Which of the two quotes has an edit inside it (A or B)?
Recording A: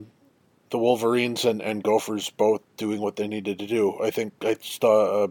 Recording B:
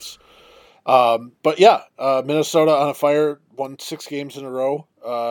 B